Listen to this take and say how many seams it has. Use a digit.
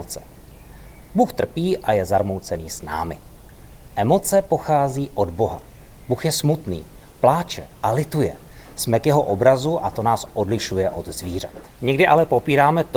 0